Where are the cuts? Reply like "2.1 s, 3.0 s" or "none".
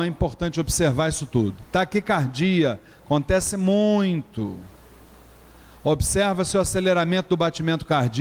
none